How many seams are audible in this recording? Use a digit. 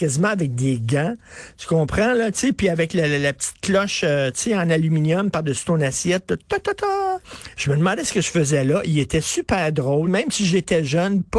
2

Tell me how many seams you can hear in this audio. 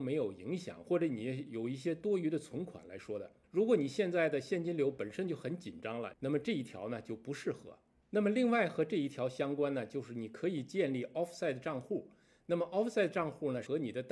1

